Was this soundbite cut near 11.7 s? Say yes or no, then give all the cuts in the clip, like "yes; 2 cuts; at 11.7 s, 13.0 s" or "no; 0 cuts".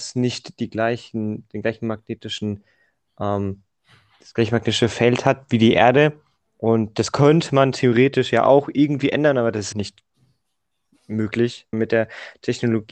yes; 2 cuts; at 9.7 s, 11.7 s